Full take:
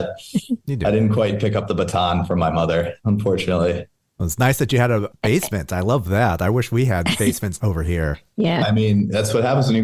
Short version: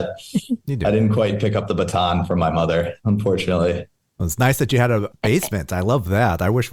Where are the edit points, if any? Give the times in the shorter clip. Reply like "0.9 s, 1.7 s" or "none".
none